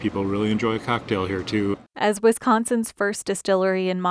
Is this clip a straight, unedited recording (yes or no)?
yes